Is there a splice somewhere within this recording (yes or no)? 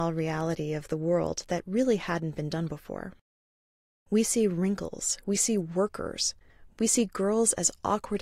yes